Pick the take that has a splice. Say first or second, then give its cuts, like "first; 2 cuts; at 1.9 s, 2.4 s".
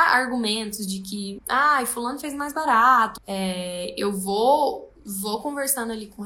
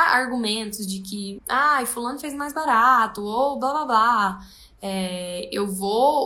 first; 1 cut; at 3.2 s